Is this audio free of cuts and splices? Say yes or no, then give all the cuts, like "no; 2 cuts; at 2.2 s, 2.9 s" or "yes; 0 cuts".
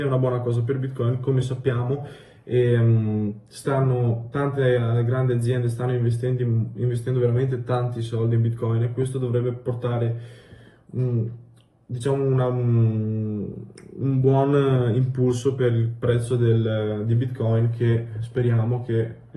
yes; 0 cuts